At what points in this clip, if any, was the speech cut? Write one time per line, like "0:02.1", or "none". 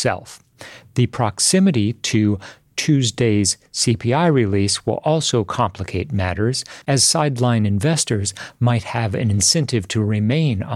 none